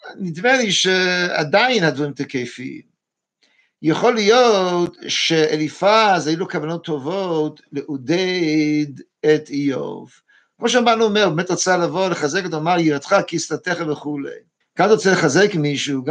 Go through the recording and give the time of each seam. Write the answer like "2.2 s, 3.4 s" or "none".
14.6 s